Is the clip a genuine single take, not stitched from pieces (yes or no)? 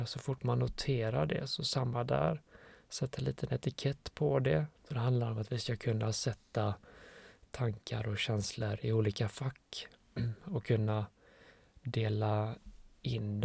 no